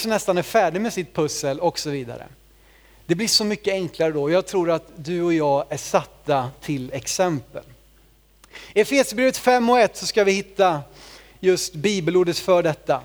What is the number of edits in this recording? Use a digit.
0